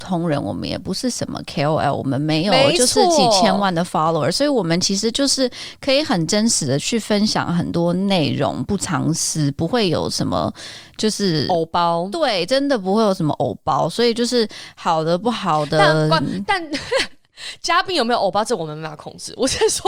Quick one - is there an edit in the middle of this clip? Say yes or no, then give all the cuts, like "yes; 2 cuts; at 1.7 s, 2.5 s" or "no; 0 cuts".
no; 0 cuts